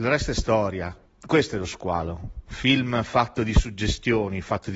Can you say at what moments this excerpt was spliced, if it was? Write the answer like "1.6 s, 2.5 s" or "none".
none